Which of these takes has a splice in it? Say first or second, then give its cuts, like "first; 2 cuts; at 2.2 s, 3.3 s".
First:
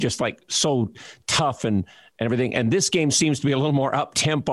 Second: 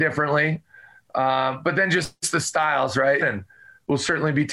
second; 1 cut; at 3.2 s